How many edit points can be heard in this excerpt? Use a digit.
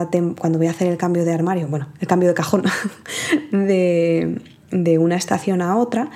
0